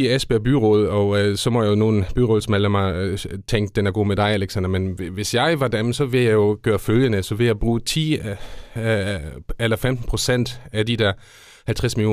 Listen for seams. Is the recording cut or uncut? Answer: uncut